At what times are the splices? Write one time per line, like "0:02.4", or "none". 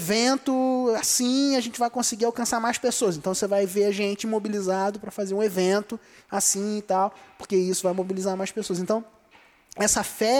none